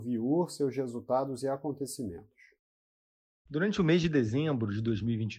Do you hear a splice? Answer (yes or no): yes